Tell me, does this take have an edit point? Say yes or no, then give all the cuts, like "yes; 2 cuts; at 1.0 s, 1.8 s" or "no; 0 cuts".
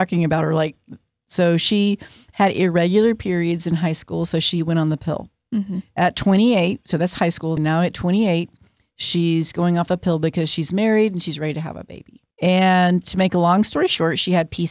yes; 2 cuts; at 7.6 s, 12.3 s